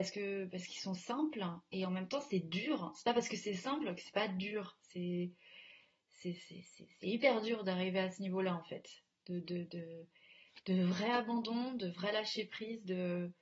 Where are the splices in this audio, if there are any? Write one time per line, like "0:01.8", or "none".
none